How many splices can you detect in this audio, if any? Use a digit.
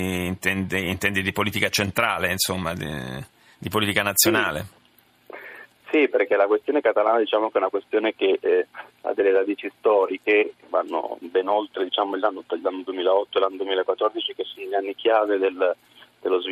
0